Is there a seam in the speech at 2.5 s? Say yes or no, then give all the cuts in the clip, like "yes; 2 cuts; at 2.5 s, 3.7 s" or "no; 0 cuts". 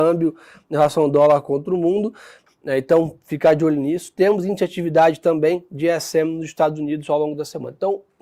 yes; 1 cut; at 2.5 s